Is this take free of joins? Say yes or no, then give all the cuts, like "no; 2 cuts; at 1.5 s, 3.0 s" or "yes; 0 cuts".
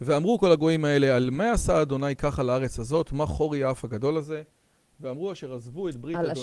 yes; 0 cuts